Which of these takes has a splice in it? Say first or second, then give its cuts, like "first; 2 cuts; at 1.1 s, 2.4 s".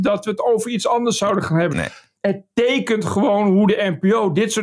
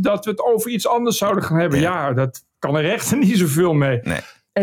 first; 1 cut; at 1.7 s